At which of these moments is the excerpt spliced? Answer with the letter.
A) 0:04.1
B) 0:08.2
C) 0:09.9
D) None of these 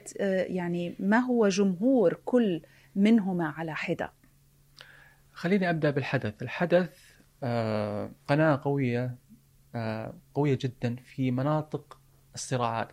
B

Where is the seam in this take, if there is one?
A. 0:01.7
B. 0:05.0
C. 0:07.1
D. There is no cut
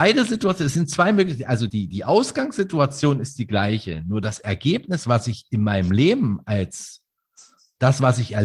A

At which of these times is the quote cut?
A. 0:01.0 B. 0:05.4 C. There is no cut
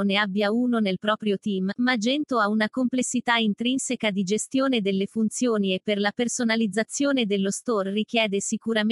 C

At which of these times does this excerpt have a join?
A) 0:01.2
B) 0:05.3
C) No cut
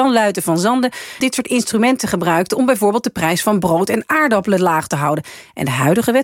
A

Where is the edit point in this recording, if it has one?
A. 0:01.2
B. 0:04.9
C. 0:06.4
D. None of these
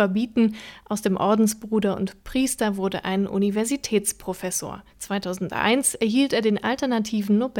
B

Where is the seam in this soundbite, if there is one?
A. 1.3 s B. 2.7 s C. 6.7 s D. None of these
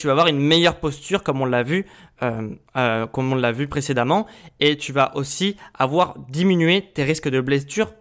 B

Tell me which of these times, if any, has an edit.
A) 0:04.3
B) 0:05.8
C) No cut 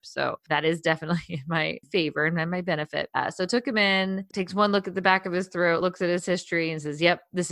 C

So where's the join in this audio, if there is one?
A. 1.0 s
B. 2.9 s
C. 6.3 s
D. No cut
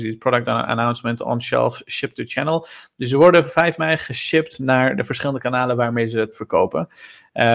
C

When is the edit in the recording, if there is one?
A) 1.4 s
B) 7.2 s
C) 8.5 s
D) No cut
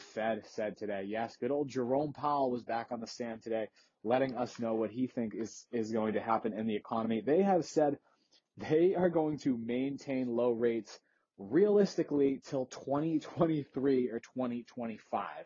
D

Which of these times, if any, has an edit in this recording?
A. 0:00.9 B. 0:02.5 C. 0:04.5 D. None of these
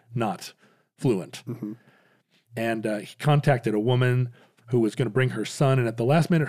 B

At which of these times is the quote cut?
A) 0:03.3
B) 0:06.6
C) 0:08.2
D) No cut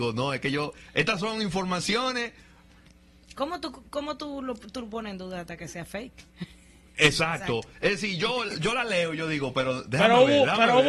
D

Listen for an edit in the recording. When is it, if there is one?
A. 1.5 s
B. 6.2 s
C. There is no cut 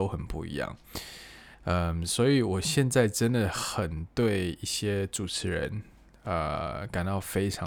A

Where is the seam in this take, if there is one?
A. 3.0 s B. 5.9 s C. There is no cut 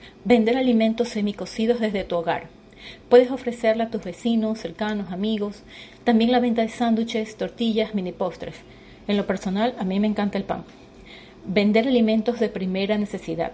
A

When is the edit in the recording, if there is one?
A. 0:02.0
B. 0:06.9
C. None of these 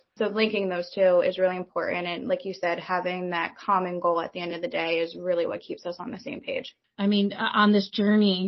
B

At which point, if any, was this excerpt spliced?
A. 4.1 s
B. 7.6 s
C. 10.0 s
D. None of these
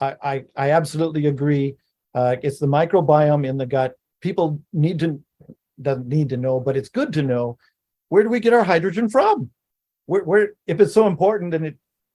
C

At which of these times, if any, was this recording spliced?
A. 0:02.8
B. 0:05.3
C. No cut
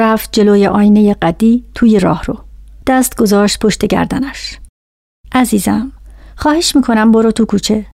A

